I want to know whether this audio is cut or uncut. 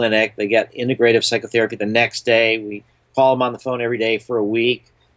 uncut